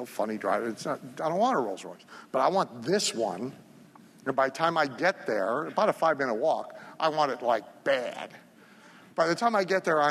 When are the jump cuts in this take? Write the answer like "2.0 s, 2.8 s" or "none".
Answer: none